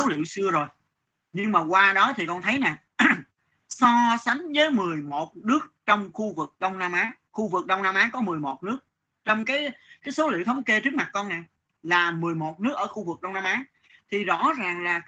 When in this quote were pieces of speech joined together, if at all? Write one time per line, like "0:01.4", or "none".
none